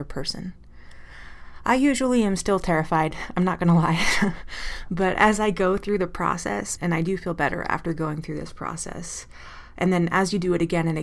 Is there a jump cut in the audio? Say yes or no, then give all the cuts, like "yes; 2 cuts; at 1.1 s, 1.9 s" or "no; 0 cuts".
yes; 1 cut; at 6.8 s